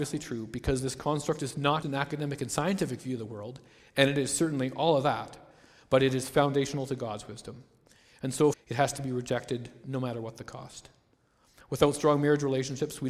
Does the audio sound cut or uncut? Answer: cut